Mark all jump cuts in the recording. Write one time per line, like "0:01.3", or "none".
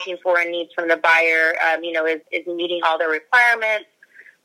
0:02.2